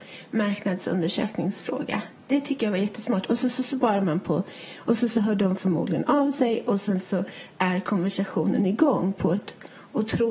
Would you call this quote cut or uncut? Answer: uncut